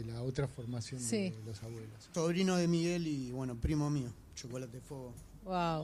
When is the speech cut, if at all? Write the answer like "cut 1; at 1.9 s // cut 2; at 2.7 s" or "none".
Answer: cut 1; at 2.1 s